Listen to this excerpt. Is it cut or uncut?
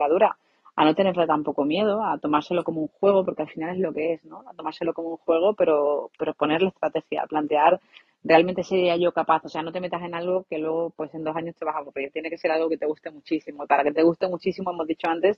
uncut